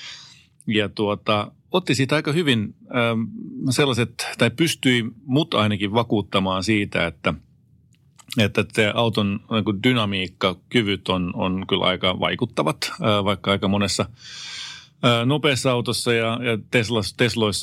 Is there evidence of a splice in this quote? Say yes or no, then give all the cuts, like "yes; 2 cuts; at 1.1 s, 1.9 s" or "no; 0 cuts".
no; 0 cuts